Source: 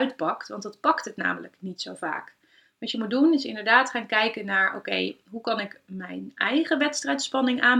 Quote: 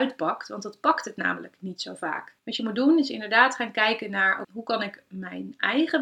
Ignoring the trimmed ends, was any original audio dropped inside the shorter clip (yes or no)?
yes